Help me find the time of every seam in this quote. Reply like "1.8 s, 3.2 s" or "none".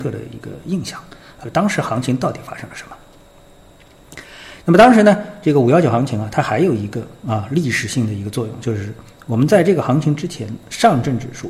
1.4 s, 4.6 s